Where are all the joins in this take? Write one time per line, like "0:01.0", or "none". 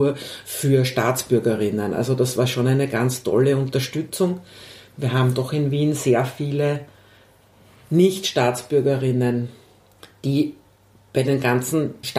none